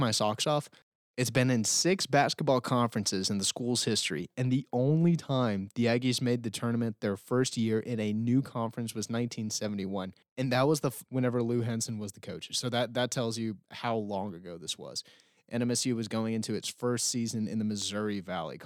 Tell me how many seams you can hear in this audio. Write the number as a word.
one